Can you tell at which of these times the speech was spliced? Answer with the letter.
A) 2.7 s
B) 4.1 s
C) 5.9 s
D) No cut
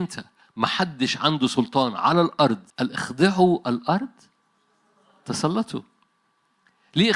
A